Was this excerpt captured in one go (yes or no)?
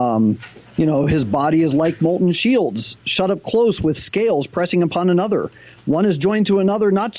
yes